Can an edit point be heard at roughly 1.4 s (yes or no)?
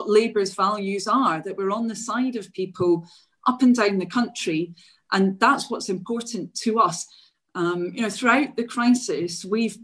no